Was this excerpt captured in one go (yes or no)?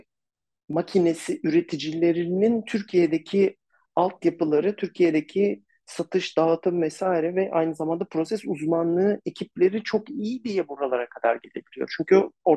yes